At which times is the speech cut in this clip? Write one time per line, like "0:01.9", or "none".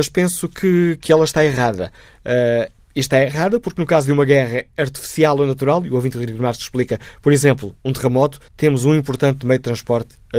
0:08.5